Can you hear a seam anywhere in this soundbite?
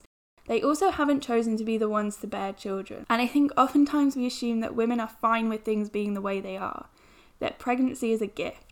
no; 0 cuts

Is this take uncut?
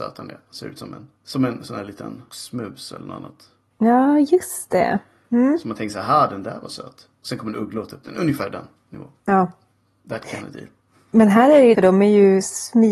no; 1 cut; at 11.7 s

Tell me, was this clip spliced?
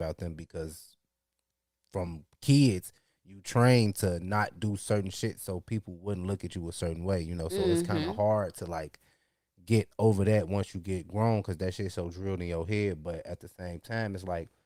no; 0 cuts

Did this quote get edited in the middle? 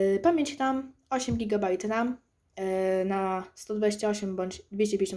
no; 0 cuts

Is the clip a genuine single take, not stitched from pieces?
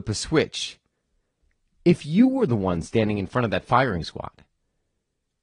no; 1 cut; at 1.7 s

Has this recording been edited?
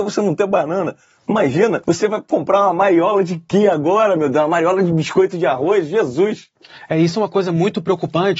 yes; 1 cut; at 1.8 s

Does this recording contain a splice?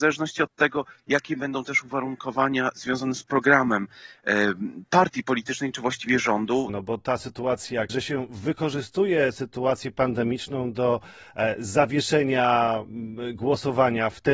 yes; 2 cuts; at 6.7 s, 7.9 s

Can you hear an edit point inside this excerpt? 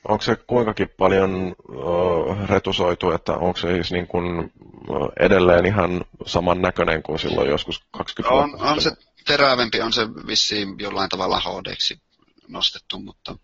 no; 0 cuts

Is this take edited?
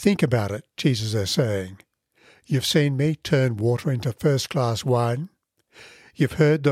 no; 0 cuts

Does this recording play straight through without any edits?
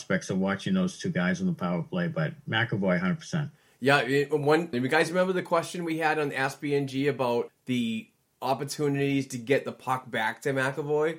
no; 2 cuts; at 4.7 s, 7.5 s

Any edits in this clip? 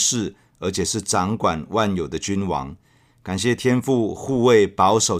no; 0 cuts

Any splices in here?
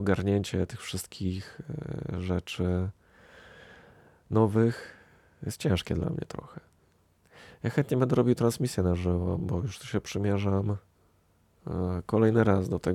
no; 0 cuts

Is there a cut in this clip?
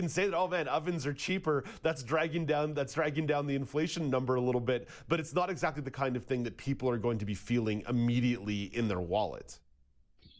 no; 0 cuts

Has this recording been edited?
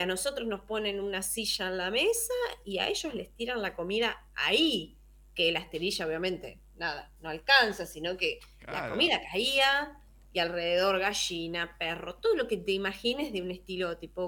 no; 0 cuts

